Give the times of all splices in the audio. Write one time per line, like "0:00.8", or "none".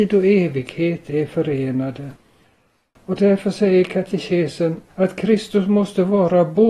0:04.9